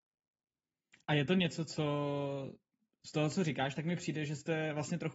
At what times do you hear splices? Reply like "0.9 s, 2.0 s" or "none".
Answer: none